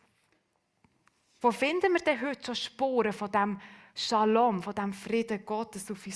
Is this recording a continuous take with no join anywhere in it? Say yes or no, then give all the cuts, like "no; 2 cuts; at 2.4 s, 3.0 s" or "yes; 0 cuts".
no; 1 cut; at 1.4 s